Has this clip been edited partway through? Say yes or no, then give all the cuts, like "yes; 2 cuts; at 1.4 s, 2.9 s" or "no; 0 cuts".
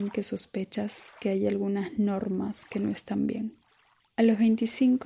yes; 1 cut; at 4.1 s